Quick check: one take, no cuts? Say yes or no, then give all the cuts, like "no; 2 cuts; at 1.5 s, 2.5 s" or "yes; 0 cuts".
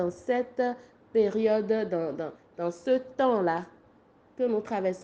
yes; 0 cuts